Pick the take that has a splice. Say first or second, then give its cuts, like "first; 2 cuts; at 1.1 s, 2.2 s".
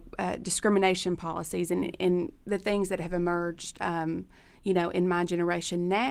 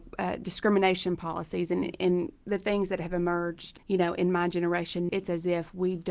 second; 2 cuts; at 3.8 s, 5.1 s